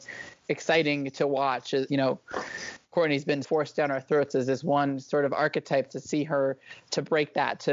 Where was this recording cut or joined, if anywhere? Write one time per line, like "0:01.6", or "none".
0:01.9
0:03.4

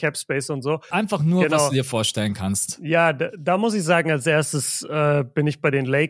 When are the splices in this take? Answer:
0:00.9

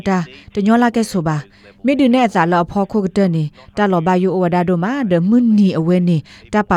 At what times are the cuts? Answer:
none

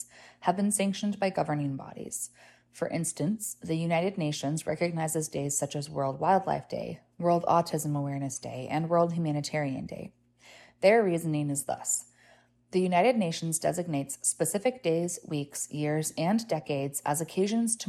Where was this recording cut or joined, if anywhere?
none

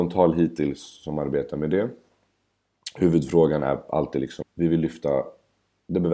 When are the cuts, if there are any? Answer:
0:04.4

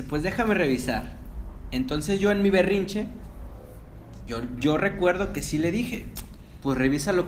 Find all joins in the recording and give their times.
none

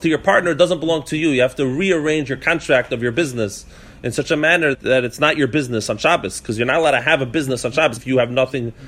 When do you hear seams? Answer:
0:04.7
0:08.0

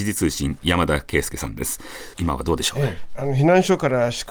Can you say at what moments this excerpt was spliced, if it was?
0:02.1

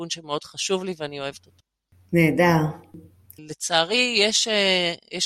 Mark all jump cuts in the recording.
0:03.4

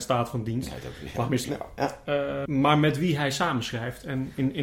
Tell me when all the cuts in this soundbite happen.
0:01.4
0:02.5

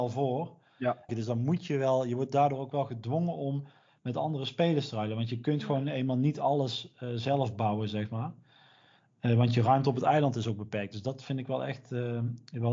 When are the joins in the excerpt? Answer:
0:01.1

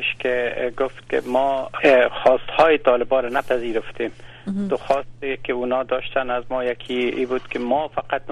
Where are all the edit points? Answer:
0:01.8

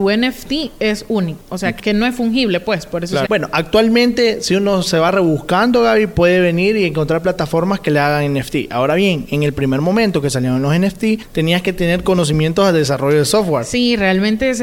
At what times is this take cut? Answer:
0:03.2

